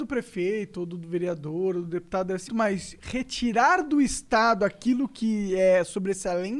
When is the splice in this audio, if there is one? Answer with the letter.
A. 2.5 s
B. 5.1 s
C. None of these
A